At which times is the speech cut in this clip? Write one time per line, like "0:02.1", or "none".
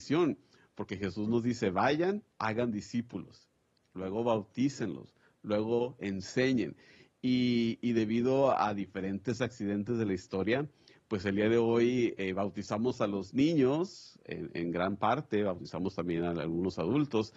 0:02.3